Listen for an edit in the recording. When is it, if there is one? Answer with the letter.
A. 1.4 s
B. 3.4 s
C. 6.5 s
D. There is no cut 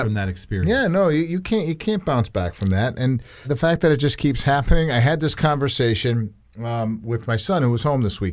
B